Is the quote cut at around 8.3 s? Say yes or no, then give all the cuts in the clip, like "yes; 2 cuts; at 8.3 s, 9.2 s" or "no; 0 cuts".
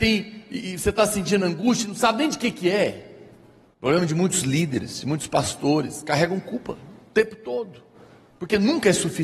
no; 1 cut; at 3.7 s